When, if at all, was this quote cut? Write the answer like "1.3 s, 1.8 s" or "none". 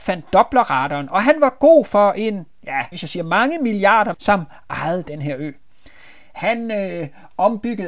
2.9 s, 4.1 s